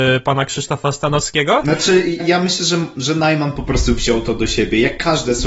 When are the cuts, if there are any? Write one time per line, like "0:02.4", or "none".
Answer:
0:02.2